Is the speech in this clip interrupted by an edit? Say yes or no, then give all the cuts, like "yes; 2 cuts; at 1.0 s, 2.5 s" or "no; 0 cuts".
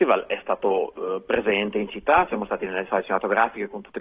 no; 0 cuts